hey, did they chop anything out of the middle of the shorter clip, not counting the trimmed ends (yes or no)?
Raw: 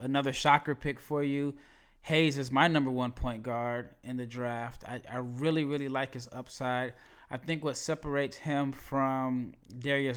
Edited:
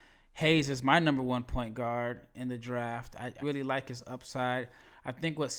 yes